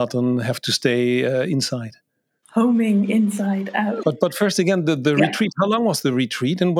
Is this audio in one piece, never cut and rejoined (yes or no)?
no